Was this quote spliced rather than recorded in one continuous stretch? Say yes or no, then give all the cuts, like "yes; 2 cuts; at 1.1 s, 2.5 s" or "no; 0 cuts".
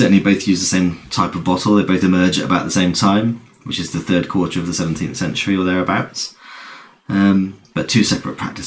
no; 0 cuts